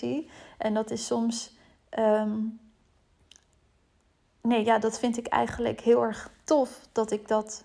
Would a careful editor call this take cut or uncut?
uncut